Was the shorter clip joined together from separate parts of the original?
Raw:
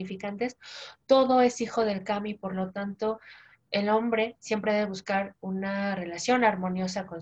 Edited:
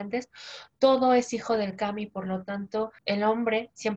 yes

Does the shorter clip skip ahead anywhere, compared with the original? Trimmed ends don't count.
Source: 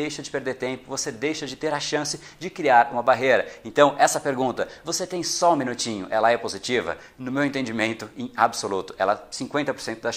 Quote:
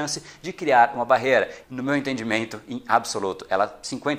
yes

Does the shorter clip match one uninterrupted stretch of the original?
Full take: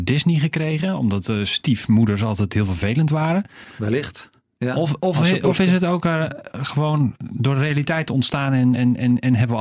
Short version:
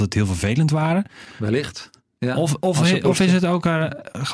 yes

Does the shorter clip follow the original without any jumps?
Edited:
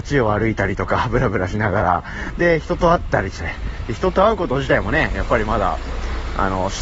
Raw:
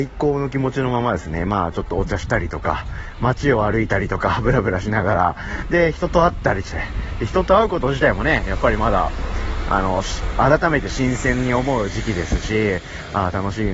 yes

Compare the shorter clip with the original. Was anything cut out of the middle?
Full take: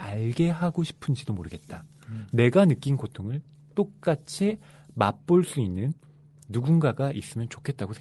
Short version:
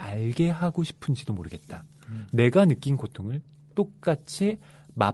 no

